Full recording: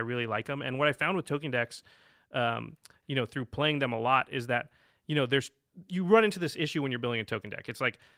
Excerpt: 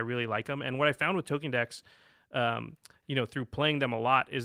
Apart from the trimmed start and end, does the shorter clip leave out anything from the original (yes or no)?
no